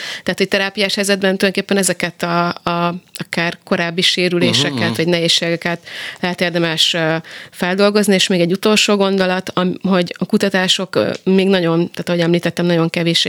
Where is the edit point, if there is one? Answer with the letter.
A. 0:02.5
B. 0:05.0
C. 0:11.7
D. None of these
D